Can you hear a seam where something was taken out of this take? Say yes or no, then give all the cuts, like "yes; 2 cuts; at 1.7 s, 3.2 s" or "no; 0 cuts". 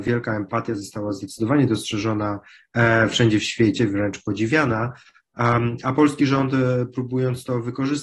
no; 0 cuts